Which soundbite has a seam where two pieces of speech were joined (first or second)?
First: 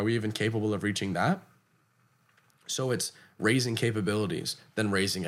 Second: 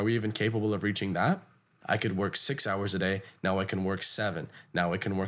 second